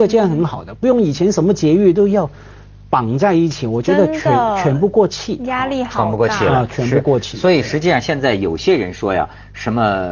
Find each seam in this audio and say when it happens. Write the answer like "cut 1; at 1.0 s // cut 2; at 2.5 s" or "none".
none